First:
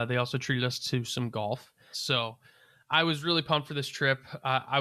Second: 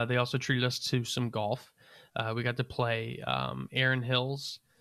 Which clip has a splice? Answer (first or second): first